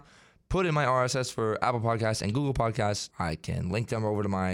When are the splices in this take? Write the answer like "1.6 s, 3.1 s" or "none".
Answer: 3.1 s